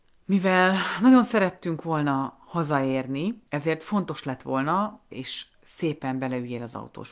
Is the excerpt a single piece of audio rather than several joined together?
no; 2 cuts; at 3.5 s, 5.1 s

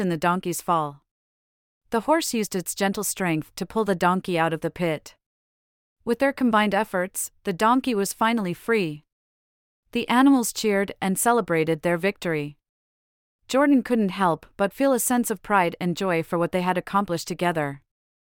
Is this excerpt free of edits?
yes; 0 cuts

